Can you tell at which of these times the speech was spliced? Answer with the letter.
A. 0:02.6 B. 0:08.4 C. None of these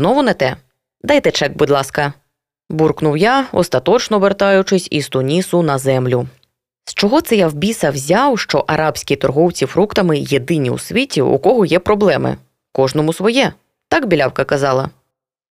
C